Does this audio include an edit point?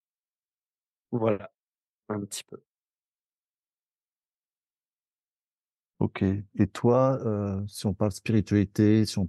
no; 0 cuts

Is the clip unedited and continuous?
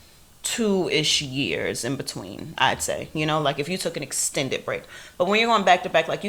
yes; 0 cuts

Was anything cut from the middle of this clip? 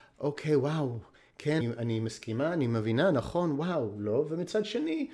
yes; 1 cut; at 1.6 s

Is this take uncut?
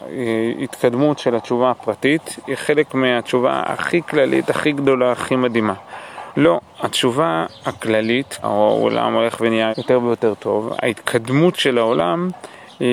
no; 3 cuts; at 6.3 s, 8.4 s, 9.7 s

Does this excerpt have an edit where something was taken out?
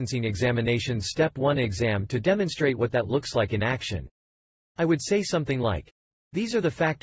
no; 0 cuts

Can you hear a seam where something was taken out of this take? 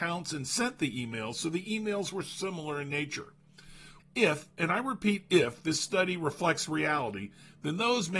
yes; 1 cut; at 4.0 s

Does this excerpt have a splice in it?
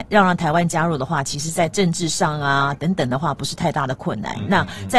no; 0 cuts

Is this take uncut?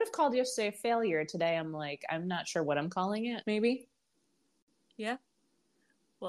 no; 1 cut; at 3.4 s

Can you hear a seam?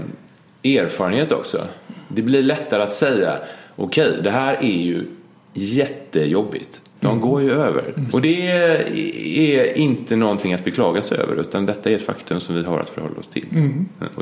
yes; 2 cuts; at 7.0 s, 8.1 s

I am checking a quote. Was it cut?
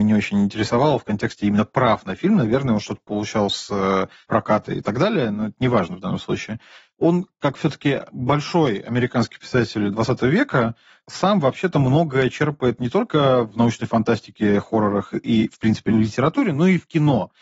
no; 0 cuts

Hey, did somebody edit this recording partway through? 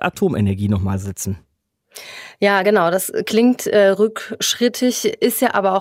no; 0 cuts

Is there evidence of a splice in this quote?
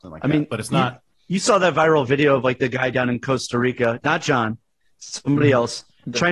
no; 0 cuts

